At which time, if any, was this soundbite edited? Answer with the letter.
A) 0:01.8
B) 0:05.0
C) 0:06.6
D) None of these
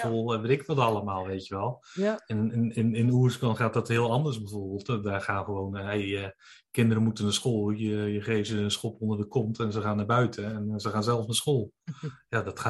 D